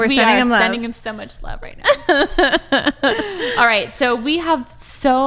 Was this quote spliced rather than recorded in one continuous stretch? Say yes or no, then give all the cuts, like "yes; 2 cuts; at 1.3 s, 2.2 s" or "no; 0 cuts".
no; 0 cuts